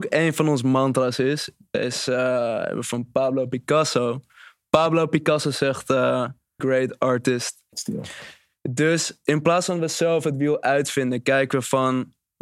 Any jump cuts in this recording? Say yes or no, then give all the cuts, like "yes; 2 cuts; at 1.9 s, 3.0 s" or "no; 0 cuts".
yes; 2 cuts; at 6.6 s, 7.7 s